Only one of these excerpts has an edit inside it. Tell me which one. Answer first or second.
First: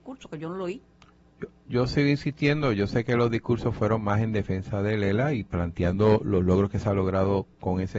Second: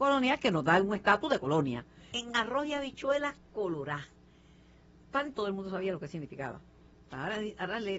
second